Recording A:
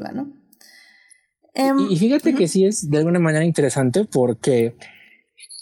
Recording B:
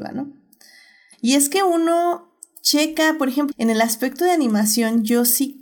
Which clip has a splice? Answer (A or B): B